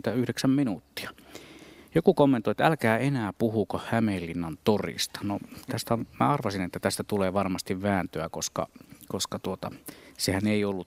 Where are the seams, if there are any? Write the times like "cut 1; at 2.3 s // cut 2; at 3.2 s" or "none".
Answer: none